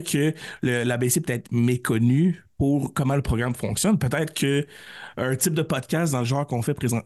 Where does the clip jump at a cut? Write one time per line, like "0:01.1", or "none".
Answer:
none